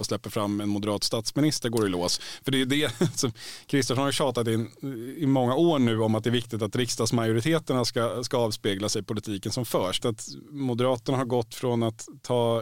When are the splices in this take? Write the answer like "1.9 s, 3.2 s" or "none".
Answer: 10.0 s